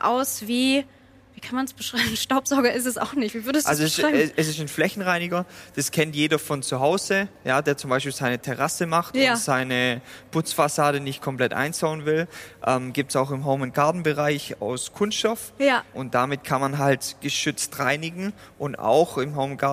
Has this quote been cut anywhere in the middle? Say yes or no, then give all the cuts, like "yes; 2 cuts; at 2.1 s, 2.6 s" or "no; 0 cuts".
no; 0 cuts